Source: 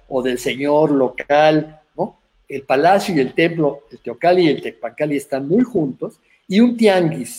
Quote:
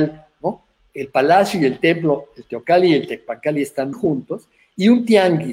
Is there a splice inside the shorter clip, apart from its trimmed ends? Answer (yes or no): yes